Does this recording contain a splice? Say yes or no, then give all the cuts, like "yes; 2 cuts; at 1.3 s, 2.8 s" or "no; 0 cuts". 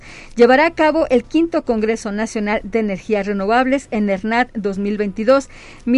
no; 0 cuts